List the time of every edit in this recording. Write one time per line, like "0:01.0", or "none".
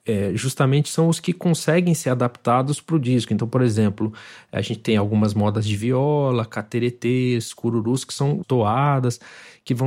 0:08.4

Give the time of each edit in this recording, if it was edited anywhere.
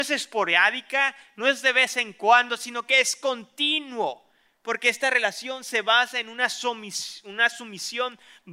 none

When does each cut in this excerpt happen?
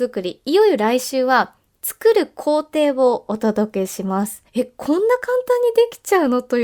0:04.5

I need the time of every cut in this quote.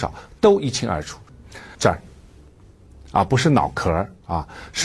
0:01.7

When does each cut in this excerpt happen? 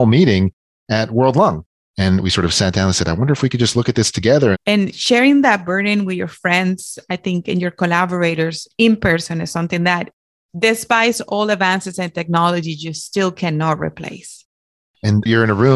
0:04.5

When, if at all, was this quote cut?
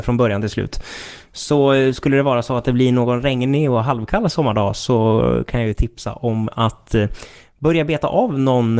none

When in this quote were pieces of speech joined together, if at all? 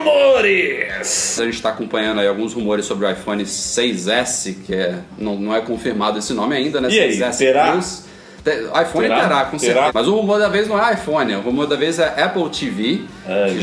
0:01.4
0:09.9

